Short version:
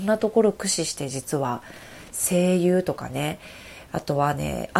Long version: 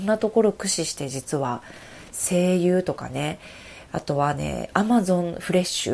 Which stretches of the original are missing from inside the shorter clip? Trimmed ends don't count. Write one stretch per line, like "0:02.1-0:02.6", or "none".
none